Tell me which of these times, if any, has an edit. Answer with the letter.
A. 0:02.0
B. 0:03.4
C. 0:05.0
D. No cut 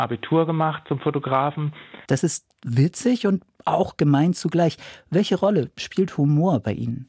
A